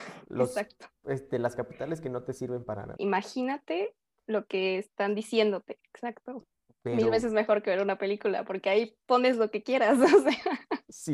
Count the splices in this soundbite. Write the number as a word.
two